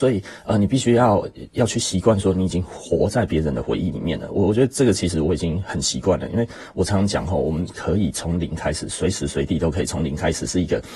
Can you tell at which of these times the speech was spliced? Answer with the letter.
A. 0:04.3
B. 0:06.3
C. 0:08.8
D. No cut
D